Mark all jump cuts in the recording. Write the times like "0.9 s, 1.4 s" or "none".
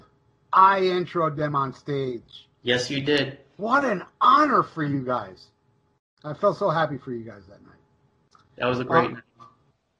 2.5 s